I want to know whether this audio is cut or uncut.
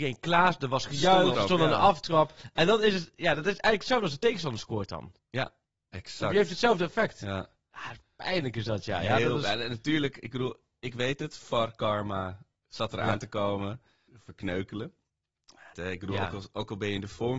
cut